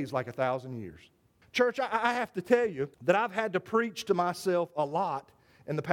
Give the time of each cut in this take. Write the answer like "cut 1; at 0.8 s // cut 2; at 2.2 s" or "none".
cut 1; at 1.4 s // cut 2; at 2.9 s